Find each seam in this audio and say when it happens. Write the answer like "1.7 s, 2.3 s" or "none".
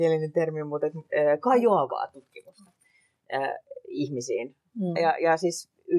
5.0 s